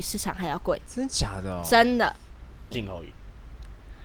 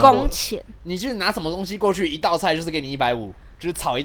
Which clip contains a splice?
first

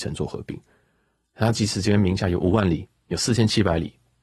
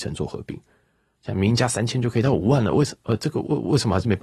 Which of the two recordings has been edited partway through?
second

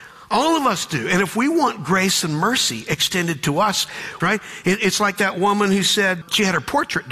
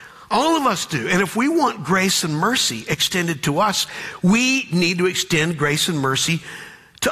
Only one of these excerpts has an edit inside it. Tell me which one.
first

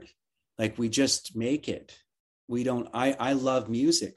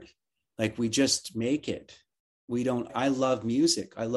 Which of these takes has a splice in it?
second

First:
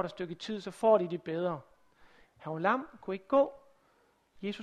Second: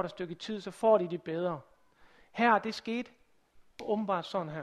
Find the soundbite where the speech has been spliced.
first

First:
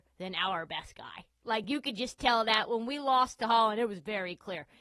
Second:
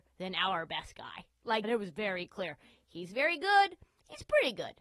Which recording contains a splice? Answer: second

